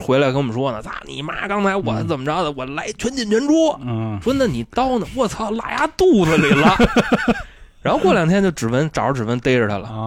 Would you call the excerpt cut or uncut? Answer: uncut